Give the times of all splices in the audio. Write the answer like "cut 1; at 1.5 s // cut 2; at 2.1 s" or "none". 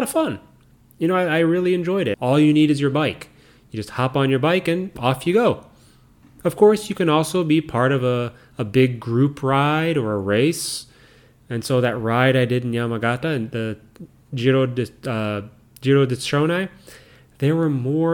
cut 1; at 2.1 s